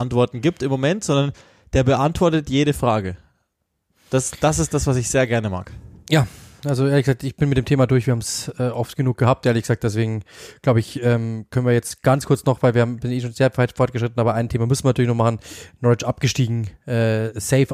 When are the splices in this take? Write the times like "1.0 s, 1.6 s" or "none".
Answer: none

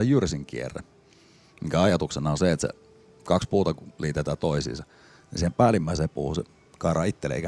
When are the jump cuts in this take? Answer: none

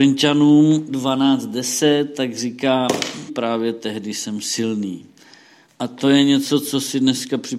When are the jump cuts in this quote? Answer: 3.3 s, 5.7 s

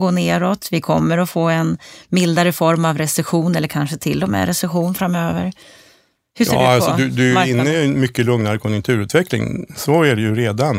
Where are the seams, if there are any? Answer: none

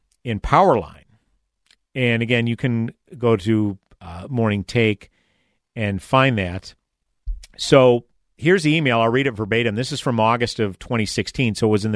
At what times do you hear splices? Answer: none

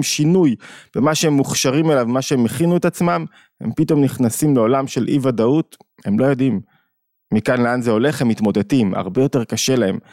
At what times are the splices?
none

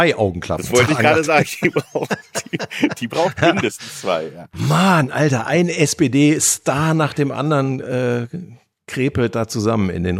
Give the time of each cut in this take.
none

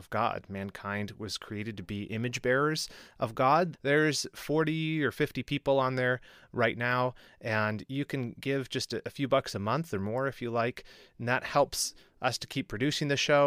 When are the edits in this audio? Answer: 3.7 s

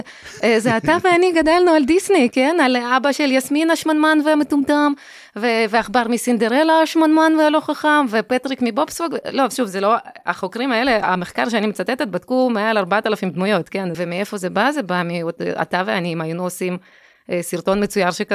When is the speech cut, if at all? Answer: 13.9 s

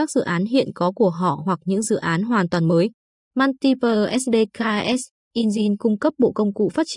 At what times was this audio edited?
3.2 s

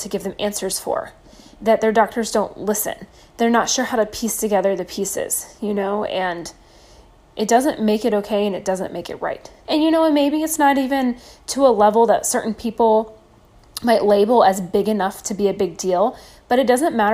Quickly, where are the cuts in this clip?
9.6 s

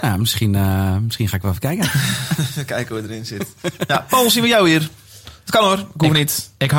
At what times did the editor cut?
none

